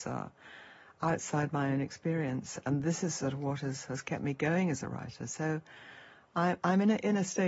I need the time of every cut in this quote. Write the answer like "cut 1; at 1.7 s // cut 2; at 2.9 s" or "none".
none